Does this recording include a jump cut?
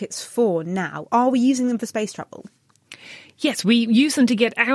no; 0 cuts

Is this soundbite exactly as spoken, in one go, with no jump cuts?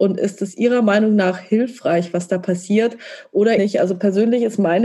no; 1 cut; at 3.6 s

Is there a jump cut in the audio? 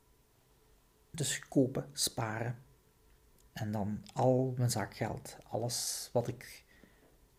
no; 0 cuts

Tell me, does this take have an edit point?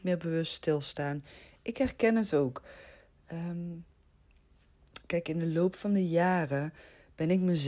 yes; 1 cut; at 5.0 s

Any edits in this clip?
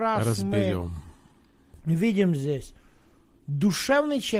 no; 0 cuts

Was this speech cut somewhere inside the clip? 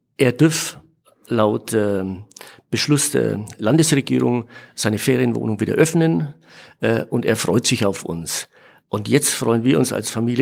no; 0 cuts

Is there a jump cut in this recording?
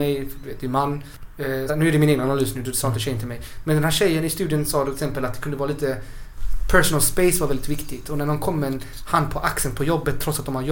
yes; 1 cut; at 1.7 s

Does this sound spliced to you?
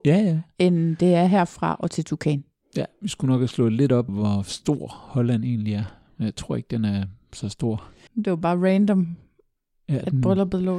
yes; 2 cuts; at 4.1 s, 8.1 s

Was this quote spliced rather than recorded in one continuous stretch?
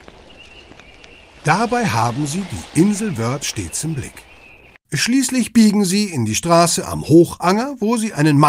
yes; 1 cut; at 4.7 s

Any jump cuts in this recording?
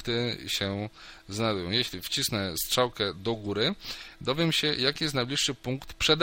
no; 0 cuts

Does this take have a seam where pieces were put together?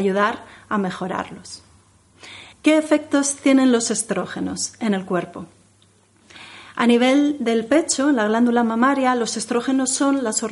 yes; 2 cuts; at 2.5 s, 6.7 s

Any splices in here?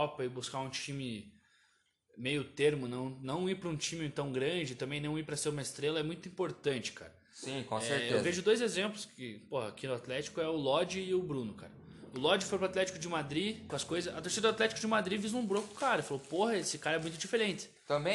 yes; 1 cut; at 13.7 s

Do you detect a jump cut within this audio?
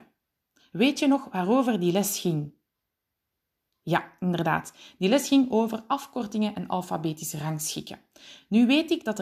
no; 0 cuts

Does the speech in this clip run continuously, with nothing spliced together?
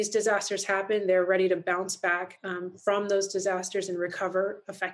yes; 0 cuts

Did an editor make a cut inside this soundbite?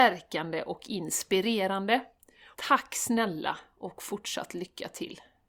yes; 1 cut; at 2.5 s

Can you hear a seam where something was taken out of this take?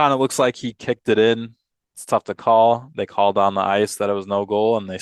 yes; 1 cut; at 1.8 s

